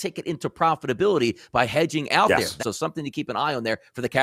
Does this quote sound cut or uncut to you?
cut